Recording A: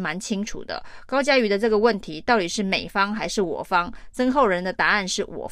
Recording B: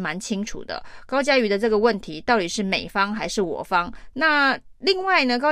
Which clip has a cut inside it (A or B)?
B